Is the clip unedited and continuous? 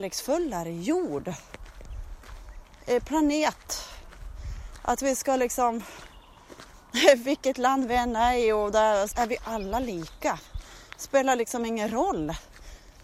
no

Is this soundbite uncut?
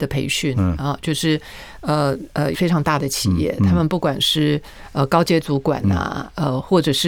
no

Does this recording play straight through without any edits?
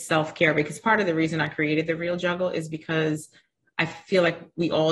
yes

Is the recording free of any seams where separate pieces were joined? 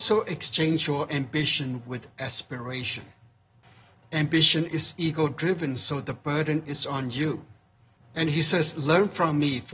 no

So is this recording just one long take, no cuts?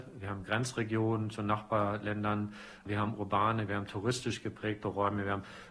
no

